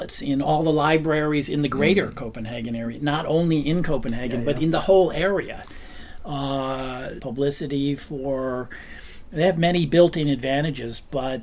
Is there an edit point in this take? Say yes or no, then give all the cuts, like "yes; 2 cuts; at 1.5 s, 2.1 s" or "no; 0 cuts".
yes; 1 cut; at 7.2 s